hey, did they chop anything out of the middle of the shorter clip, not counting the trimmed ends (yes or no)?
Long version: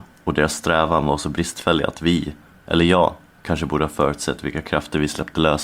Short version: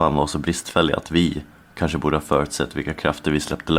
yes